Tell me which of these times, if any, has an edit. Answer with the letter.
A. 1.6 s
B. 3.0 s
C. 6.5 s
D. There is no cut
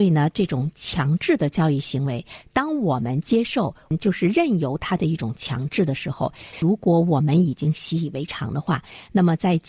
C